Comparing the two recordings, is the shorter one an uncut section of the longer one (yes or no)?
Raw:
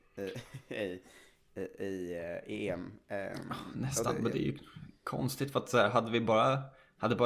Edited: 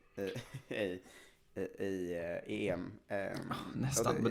yes